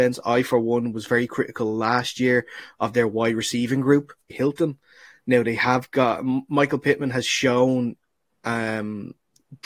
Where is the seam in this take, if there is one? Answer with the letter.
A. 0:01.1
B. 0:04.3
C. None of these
B